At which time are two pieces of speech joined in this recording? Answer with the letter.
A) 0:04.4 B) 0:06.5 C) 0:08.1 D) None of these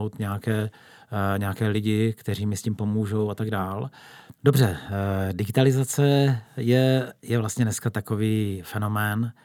A